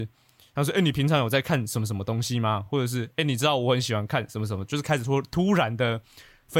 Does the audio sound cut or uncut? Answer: uncut